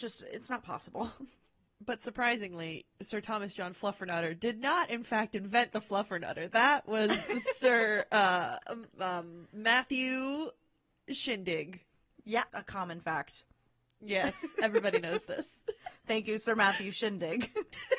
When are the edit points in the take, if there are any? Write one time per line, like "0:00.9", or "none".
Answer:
0:12.5